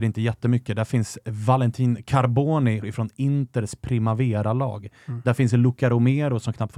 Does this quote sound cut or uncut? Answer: cut